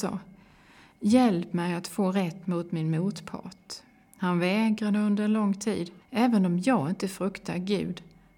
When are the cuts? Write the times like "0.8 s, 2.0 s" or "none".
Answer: 6.0 s